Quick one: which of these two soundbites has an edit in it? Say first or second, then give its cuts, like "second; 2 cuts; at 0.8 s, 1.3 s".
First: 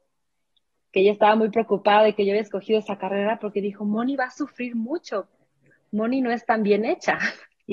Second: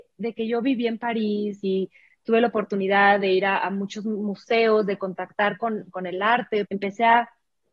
second; 1 cut; at 6.7 s